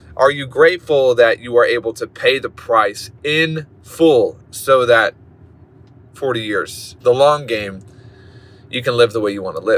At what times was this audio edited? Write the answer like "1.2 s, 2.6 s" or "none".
4.4 s, 7.0 s